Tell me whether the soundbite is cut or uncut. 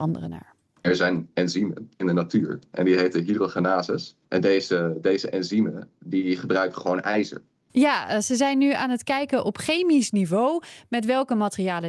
cut